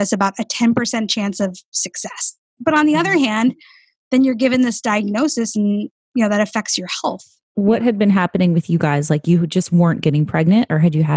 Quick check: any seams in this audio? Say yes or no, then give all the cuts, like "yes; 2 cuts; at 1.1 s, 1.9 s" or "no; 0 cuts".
yes; 1 cut; at 2.6 s